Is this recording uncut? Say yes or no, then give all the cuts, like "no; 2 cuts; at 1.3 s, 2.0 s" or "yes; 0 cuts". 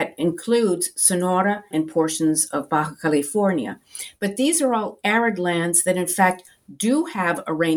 no; 1 cut; at 1.7 s